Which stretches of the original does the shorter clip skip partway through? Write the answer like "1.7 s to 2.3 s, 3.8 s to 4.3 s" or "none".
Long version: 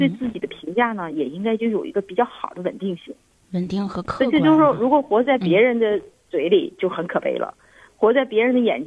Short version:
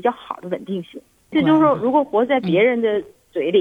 3.5 s to 4.3 s

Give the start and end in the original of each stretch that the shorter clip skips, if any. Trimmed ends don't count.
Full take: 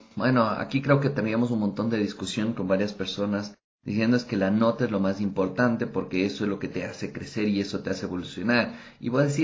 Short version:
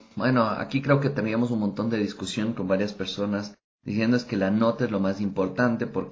none

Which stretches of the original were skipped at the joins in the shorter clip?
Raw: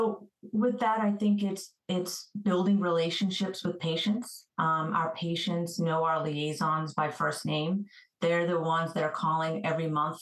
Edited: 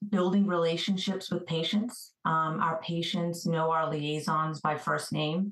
none

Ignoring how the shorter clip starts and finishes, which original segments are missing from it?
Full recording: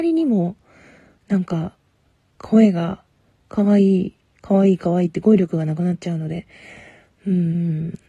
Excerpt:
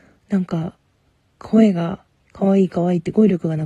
3.2 s to 4.3 s

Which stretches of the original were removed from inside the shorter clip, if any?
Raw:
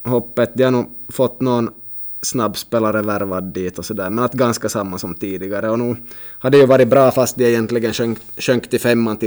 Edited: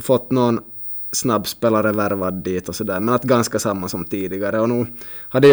none

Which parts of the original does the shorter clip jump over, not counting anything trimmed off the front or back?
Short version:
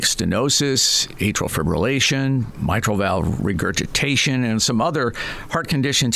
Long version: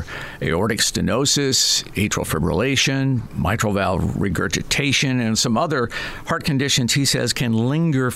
none

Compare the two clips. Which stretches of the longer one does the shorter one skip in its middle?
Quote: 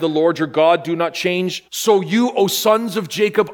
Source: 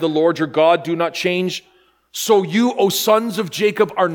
1.7 s to 2.1 s

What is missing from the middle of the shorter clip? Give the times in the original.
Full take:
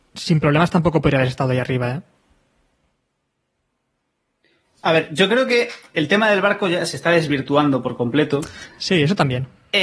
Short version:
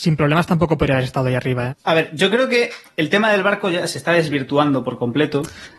1.9 s to 4.7 s

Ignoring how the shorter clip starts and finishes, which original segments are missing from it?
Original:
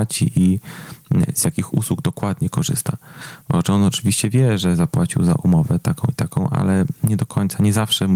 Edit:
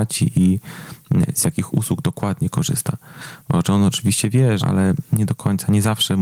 4.6 s to 6.5 s

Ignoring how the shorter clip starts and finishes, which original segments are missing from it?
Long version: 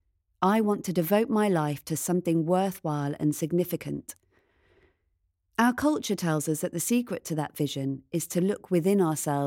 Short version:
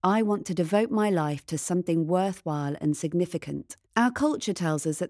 4.2 s to 5.5 s

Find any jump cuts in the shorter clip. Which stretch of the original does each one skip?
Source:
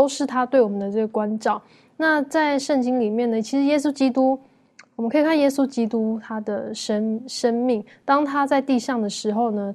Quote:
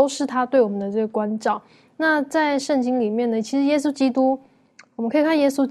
none

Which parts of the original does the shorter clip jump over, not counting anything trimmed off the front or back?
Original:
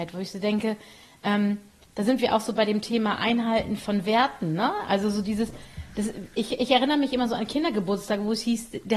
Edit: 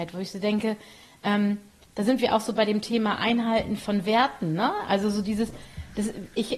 none

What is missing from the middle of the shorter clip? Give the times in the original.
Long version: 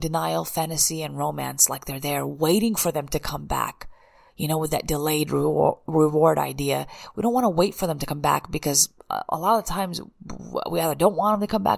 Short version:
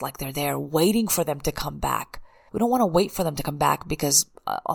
4.2 s to 7.1 s

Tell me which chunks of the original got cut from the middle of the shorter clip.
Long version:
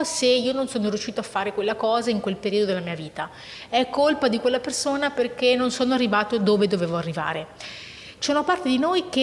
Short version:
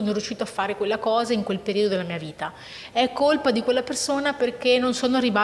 none

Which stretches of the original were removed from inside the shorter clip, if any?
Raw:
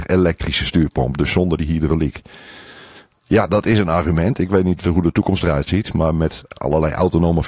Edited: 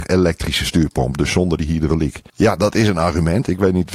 2.3 s to 3.2 s

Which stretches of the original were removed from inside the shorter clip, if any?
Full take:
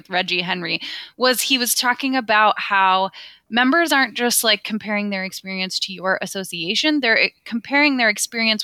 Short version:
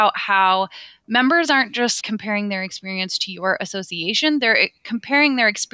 4.4 s to 4.6 s

